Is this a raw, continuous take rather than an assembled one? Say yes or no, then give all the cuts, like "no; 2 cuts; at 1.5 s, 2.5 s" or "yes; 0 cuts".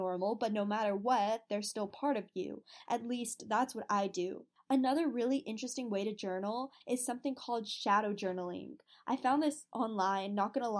no; 1 cut; at 2.9 s